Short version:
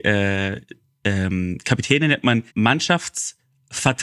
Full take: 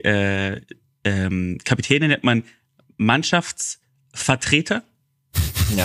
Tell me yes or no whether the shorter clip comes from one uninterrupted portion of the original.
no